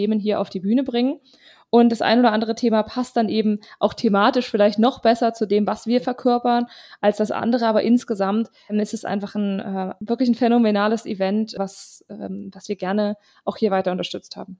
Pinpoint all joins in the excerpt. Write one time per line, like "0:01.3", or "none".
none